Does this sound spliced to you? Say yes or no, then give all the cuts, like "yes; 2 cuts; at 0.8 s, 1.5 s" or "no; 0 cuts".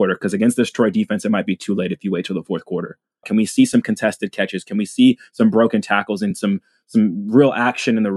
yes; 1 cut; at 3.2 s